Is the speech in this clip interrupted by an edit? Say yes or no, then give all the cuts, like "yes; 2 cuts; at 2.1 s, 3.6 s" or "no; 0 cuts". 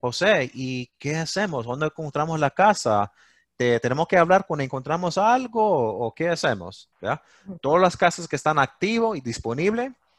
yes; 1 cut; at 6.9 s